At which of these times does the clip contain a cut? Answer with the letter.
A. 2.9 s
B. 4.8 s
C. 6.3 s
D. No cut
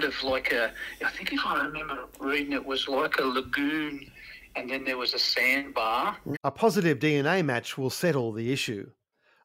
C